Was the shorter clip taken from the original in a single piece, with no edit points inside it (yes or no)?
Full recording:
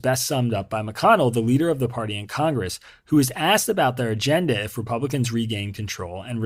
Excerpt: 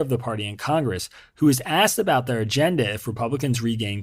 yes